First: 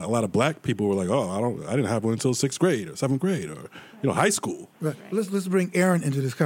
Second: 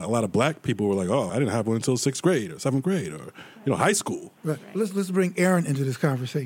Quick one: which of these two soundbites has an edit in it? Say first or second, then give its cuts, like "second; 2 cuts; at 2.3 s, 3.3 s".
second; 1 cut; at 1.3 s